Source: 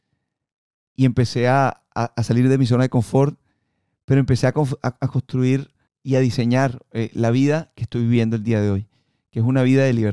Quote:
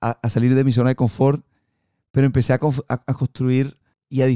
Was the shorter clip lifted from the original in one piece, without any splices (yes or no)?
yes